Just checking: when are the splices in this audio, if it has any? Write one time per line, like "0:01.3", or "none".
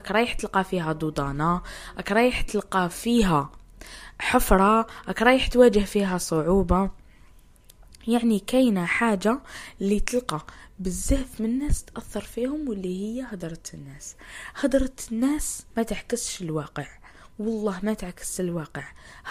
0:15.7